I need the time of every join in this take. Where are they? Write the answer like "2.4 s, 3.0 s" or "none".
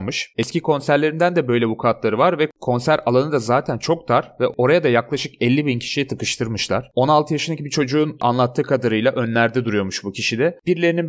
6.9 s